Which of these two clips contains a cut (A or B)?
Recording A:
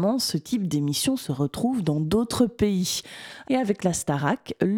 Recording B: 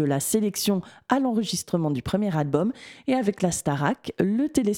A